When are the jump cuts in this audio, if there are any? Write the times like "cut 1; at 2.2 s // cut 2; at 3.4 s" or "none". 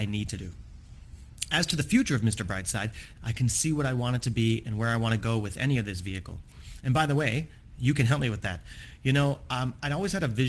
cut 1; at 3.1 s

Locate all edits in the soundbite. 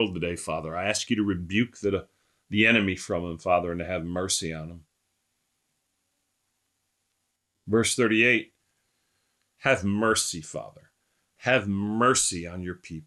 cut 1; at 9.6 s

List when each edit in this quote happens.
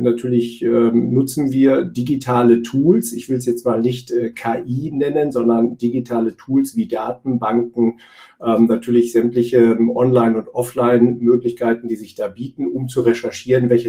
none

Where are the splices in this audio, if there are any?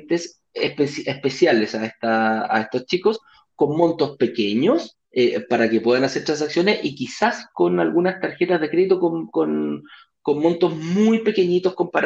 cut 1; at 5.1 s

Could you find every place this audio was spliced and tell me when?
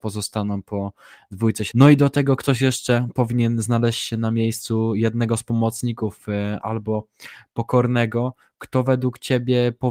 cut 1; at 1.7 s // cut 2; at 6.6 s

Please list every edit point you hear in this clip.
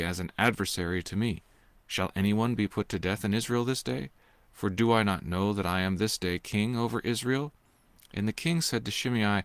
none

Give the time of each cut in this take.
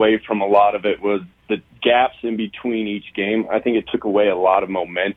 none

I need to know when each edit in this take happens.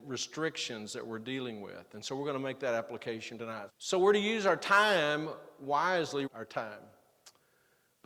cut 1; at 3.7 s // cut 2; at 6.3 s

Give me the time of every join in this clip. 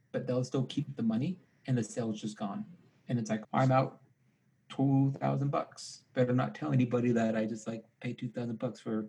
cut 1; at 3.4 s

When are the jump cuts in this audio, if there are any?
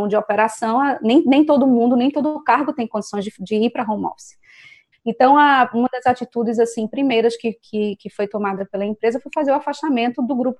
cut 1; at 4.9 s

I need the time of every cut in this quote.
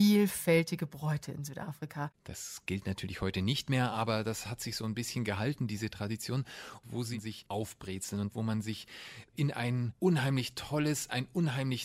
cut 1; at 2.1 s

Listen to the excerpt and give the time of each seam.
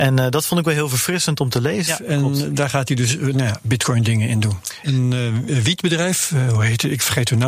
cut 1; at 1.9 s // cut 2; at 4.8 s

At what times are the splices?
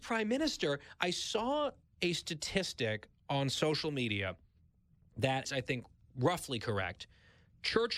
cut 1; at 5.4 s

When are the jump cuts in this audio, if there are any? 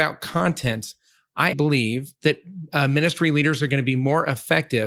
cut 1; at 1.5 s

